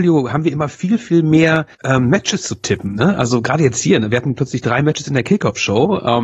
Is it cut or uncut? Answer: cut